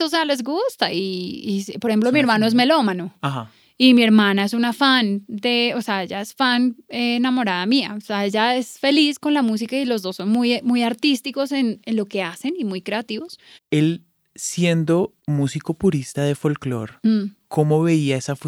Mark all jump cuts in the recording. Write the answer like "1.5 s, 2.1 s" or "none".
13.6 s, 15.2 s